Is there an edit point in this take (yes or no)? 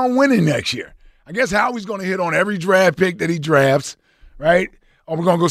no